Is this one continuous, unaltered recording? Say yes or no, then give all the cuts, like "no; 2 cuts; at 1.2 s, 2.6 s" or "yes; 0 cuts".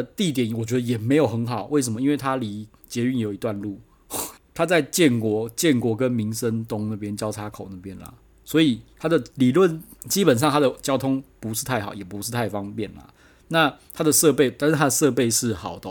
no; 2 cuts; at 4.4 s, 9.3 s